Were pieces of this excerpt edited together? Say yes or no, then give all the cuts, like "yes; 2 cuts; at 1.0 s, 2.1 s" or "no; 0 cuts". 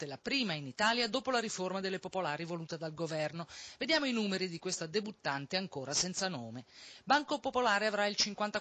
no; 0 cuts